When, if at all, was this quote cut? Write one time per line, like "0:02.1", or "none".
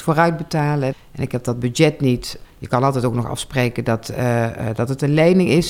0:00.9
0:02.4